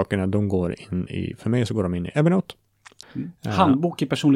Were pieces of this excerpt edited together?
yes; 1 cut; at 3.0 s

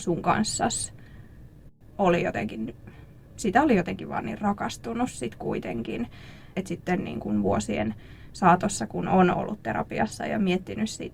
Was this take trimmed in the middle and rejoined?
yes; 1 cut; at 6.5 s

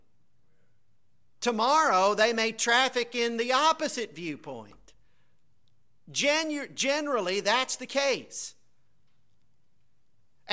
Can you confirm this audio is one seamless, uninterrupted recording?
yes; 0 cuts

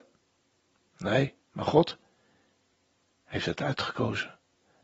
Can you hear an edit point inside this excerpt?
yes; 1 cut; at 1.4 s

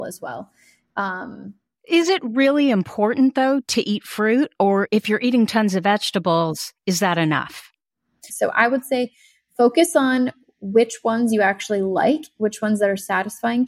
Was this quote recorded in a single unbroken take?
no; 1 cut; at 8.3 s

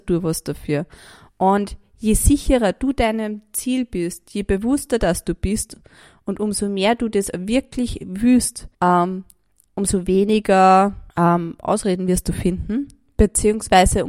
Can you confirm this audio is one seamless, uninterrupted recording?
no; 2 cuts; at 8.7 s, 11.1 s

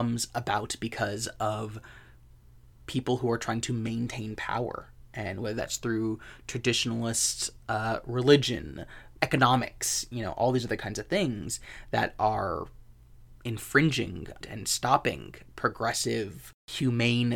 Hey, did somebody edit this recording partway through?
yes; 2 cuts; at 9.2 s, 14.4 s

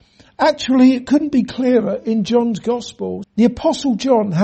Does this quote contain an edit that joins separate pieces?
yes; 1 cut; at 3.2 s

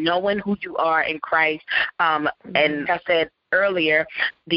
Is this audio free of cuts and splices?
no; 1 cut; at 2.8 s

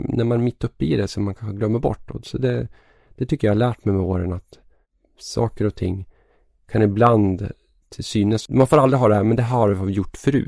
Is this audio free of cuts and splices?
no; 1 cut; at 8.5 s

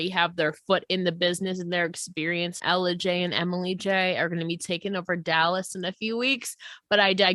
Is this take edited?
yes; 1 cut; at 2.6 s

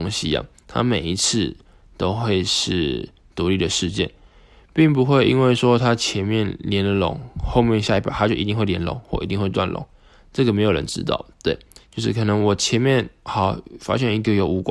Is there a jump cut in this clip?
yes; 1 cut; at 11.8 s

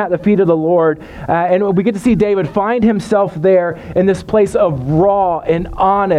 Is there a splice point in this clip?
no; 0 cuts

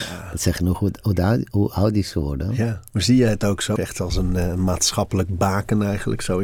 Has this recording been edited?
yes; 1 cut; at 3.8 s

